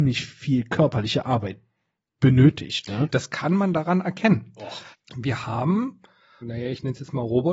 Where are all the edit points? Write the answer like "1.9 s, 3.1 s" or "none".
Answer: 3.1 s, 4.9 s, 6.4 s